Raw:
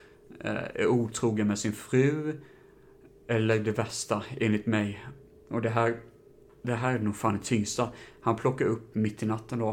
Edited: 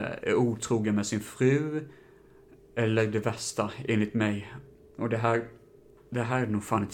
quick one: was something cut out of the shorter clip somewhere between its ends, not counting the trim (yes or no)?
no